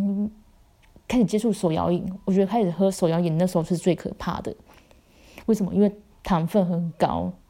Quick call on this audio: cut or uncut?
uncut